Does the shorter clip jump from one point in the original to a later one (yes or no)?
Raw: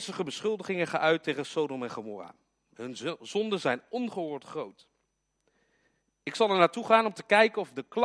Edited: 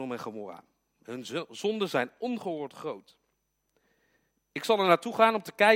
no